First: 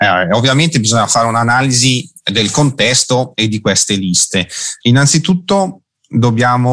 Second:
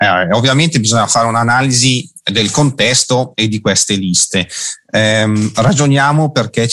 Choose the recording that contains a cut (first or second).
first